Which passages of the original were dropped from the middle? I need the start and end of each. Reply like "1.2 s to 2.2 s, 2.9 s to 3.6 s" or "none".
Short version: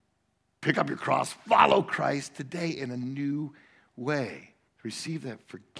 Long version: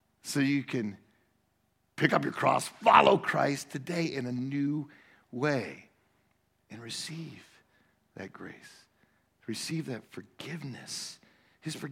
6.0 s to 9.3 s